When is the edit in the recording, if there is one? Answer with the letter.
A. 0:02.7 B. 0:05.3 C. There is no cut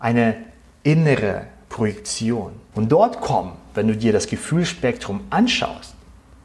A